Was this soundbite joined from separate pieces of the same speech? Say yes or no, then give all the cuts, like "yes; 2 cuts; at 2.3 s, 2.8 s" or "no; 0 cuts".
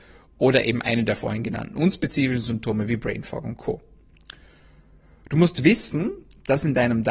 no; 0 cuts